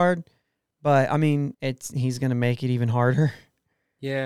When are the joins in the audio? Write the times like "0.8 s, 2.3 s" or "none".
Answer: 1.5 s

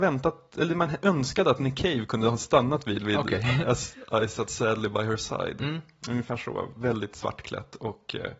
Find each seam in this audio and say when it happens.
none

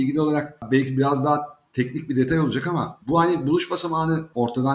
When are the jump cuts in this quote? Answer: 3.0 s

